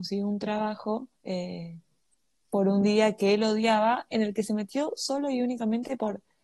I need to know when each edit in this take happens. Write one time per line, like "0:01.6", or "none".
0:01.2